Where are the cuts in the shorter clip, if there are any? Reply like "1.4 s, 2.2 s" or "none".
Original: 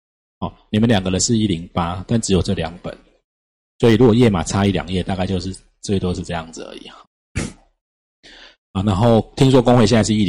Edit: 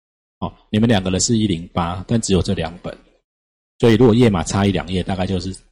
none